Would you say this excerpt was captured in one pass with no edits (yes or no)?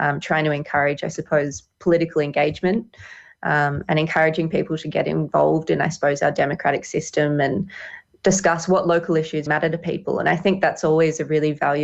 no